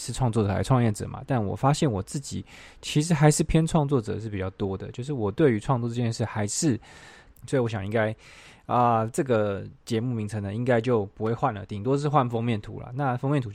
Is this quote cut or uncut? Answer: cut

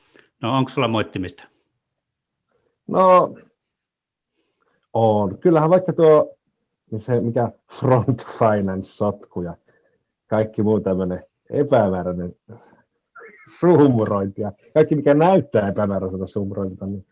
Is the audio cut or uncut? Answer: uncut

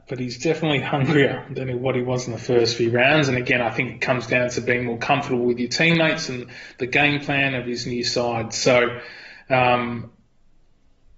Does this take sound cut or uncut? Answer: uncut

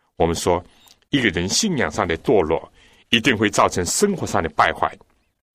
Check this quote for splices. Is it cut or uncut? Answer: uncut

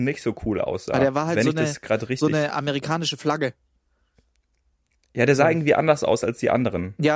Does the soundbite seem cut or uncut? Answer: uncut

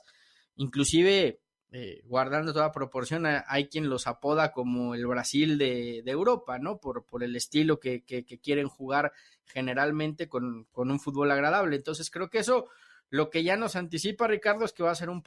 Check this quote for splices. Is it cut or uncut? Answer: uncut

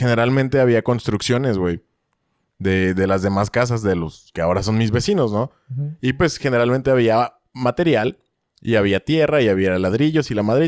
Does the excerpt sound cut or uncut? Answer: uncut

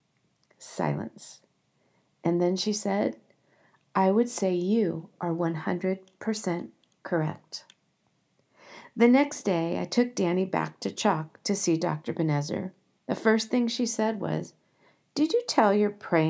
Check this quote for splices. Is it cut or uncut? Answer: uncut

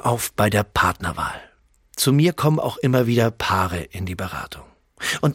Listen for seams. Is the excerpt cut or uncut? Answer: uncut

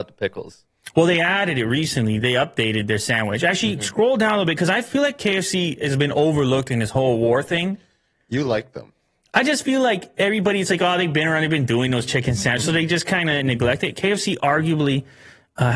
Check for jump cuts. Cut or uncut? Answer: uncut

